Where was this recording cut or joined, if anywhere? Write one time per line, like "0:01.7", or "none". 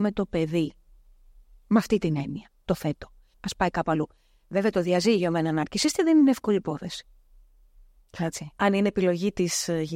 0:03.3